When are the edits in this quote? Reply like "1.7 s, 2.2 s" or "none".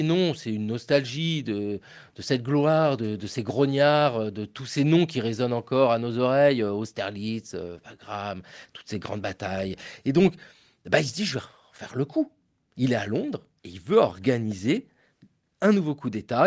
none